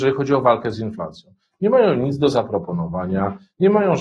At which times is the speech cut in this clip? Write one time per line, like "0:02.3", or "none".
none